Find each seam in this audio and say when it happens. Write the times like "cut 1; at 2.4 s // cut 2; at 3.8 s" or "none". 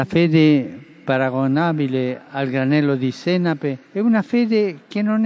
cut 1; at 3.8 s